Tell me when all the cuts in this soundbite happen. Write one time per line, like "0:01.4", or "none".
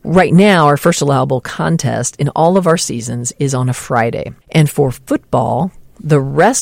0:04.4